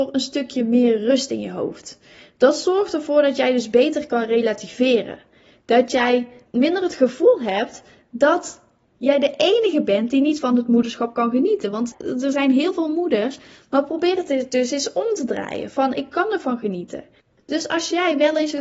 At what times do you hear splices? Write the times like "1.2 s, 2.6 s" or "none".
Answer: none